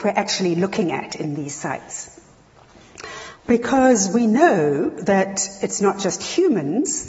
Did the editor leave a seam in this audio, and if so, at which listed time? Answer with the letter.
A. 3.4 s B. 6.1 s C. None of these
A